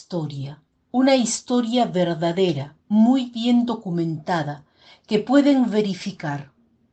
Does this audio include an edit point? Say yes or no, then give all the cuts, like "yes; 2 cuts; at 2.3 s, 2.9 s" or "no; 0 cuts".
no; 0 cuts